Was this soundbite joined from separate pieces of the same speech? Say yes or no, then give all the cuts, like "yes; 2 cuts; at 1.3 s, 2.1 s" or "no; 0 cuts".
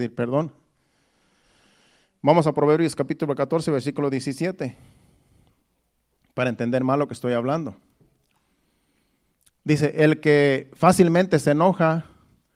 no; 0 cuts